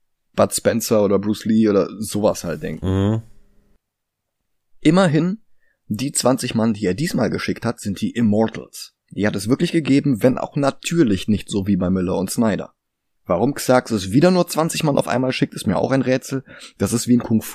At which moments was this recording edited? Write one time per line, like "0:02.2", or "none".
0:09.0
0:13.2